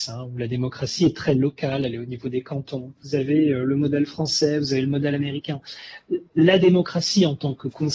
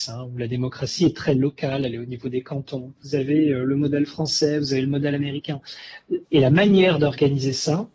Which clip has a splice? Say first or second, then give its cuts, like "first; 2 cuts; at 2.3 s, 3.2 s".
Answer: second; 1 cut; at 6.2 s